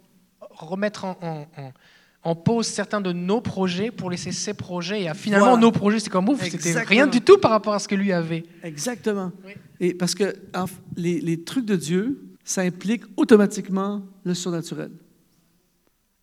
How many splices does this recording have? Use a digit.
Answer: 1